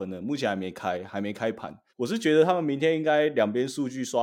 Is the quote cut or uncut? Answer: cut